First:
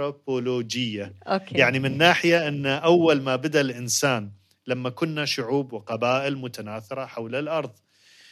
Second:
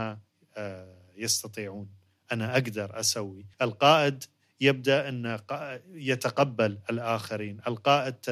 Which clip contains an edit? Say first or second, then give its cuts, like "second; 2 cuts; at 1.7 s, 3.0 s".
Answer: second; 1 cut; at 3.5 s